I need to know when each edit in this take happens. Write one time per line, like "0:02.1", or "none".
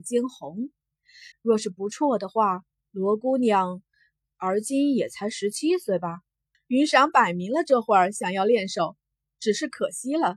0:01.3
0:06.5